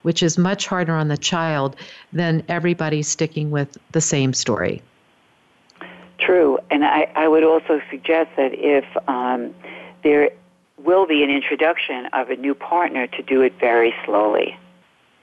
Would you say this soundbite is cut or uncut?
uncut